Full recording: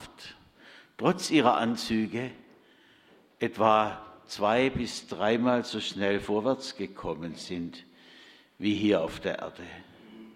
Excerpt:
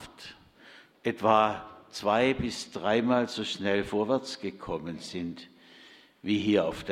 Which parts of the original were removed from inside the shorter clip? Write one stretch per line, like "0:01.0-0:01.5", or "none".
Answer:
0:00.9-0:03.3